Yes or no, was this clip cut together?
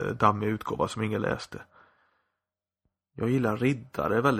no